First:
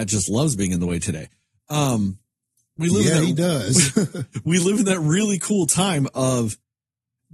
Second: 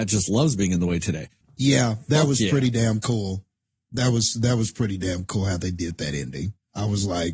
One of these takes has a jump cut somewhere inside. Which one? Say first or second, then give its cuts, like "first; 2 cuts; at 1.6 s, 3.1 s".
second; 1 cut; at 1.4 s